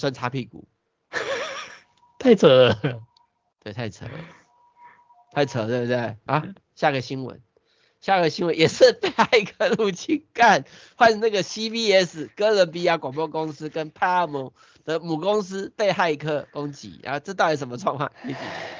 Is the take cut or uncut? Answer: cut